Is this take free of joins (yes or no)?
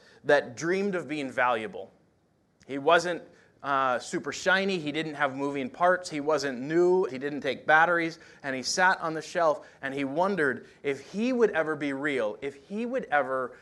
no